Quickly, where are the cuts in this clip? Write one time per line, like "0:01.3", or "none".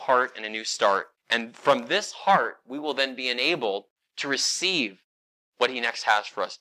0:01.2

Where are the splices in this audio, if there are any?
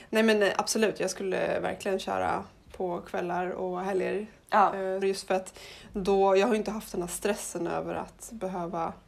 0:05.0

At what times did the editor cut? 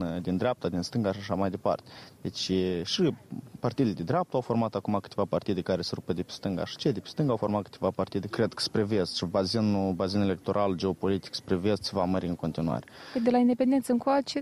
0:08.3

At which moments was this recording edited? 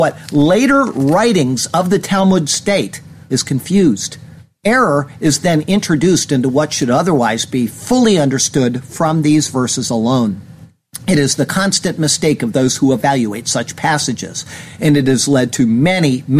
0:03.2

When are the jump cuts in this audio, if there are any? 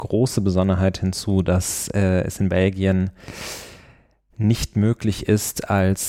none

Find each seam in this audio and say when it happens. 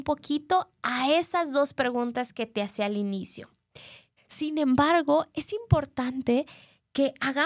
0:04.2

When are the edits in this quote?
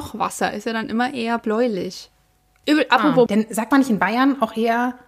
0:03.3

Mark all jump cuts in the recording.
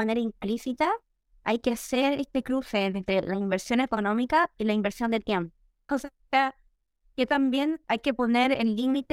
0:05.9
0:07.8

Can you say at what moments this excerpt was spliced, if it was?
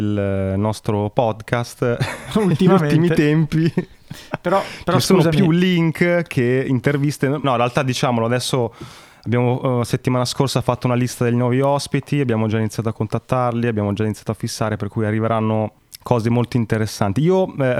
0:07.4

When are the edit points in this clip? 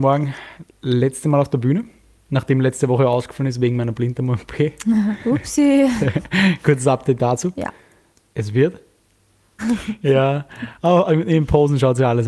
0:09.6

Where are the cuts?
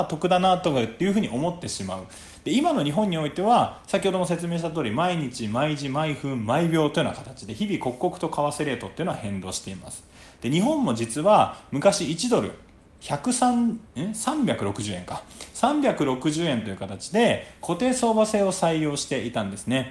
none

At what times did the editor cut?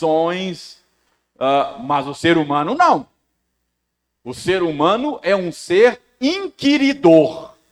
none

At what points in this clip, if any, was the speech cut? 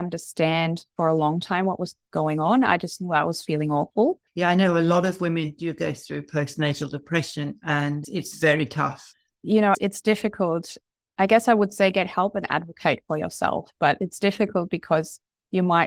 0:04.3
0:09.3

